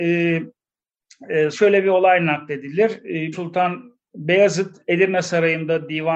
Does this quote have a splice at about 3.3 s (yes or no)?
yes